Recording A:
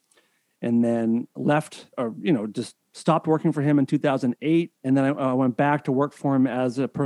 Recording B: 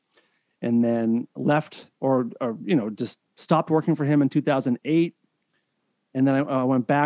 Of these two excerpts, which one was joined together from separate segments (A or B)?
A